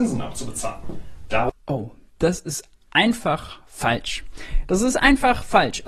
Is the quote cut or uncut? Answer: uncut